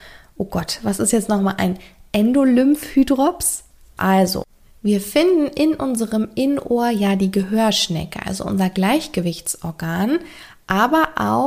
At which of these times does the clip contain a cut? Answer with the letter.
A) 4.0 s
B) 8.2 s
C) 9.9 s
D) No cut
A